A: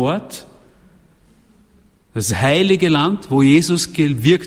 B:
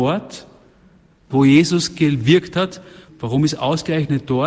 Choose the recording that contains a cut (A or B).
B